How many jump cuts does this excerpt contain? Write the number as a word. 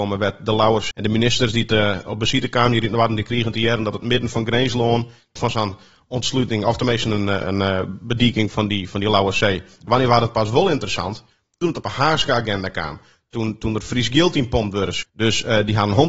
three